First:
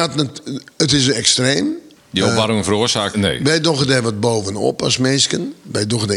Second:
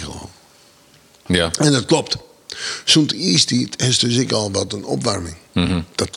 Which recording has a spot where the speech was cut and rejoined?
first; 2 cuts; at 2.0 s, 3.1 s

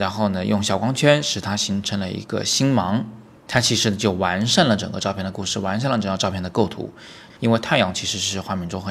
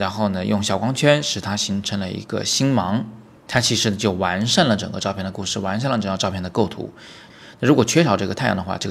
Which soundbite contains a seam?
first; 1 cut; at 7.4 s

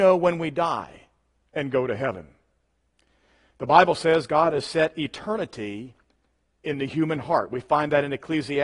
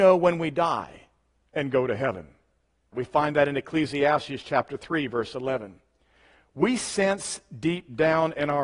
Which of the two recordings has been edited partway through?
second; 1 cut; at 2.9 s

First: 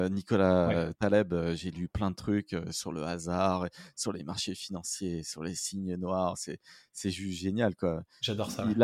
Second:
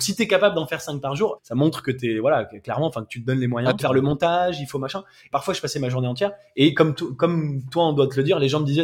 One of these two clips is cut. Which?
second; 3 cuts; at 1.4 s, 3.8 s, 5.3 s

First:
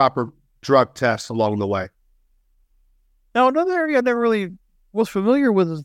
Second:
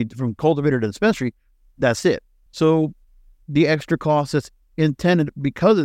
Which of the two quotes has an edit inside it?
second; 1 cut; at 2.5 s

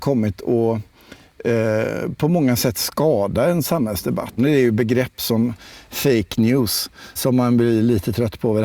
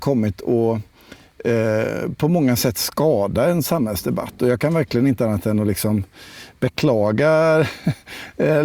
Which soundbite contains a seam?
first; 2 cuts; at 4.4 s, 7.2 s

